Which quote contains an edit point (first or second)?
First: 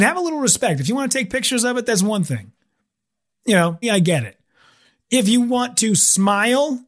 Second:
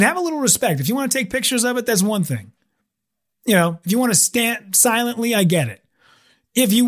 first